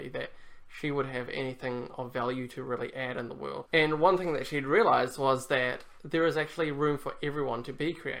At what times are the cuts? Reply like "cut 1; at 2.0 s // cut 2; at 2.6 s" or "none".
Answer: cut 1; at 3.7 s